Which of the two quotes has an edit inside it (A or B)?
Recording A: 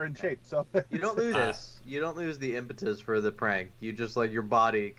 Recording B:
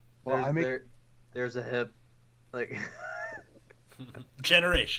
A